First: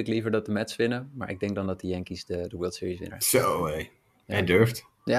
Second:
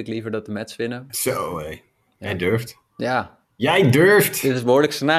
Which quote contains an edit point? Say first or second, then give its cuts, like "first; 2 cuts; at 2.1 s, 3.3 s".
second; 2 cuts; at 1.1 s, 3.4 s